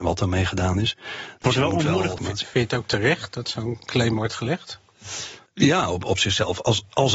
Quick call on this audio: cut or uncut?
cut